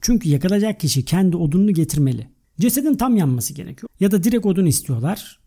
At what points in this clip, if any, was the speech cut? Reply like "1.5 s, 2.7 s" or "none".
2.4 s, 3.9 s